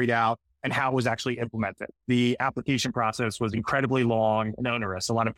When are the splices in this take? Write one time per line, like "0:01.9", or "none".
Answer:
0:02.0